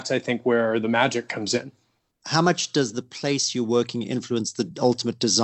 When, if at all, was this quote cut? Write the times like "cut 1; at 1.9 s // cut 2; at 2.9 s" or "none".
cut 1; at 2.1 s